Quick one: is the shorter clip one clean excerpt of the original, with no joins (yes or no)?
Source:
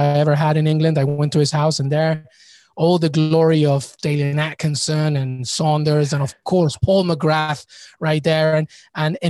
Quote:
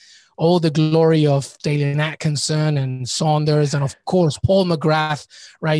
yes